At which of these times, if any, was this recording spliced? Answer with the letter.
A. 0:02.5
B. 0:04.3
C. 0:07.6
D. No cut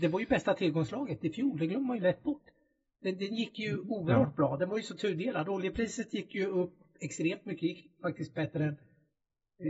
D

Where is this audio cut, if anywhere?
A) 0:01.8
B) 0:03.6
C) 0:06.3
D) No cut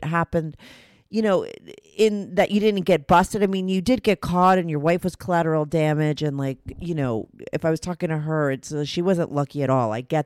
A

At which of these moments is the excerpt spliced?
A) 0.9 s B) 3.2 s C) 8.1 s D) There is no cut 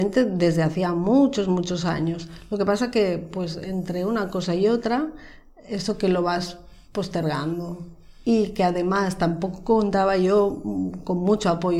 D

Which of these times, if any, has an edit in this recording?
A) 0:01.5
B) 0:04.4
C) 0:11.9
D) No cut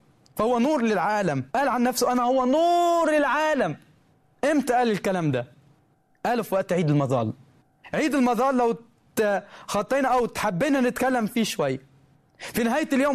A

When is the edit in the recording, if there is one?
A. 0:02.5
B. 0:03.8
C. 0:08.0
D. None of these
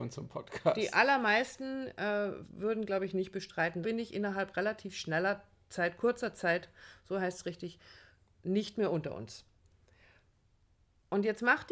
B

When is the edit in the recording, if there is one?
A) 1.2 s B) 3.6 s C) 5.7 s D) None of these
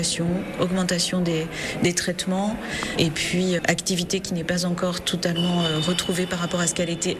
B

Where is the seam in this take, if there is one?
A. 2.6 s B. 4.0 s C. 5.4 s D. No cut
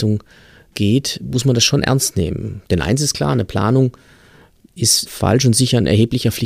D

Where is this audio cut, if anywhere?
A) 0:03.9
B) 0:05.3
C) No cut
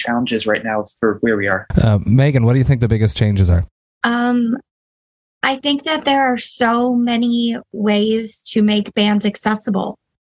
C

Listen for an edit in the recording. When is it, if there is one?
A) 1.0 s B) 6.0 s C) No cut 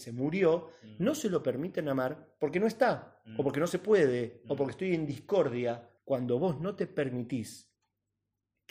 B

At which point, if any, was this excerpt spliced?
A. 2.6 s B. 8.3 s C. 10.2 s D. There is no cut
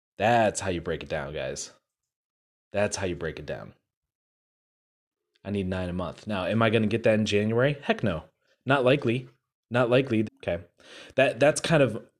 C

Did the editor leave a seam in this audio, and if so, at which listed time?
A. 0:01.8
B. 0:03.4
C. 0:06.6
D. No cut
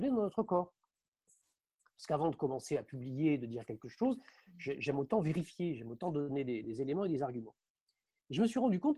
C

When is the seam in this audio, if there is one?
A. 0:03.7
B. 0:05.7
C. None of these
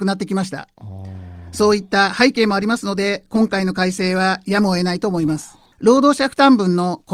B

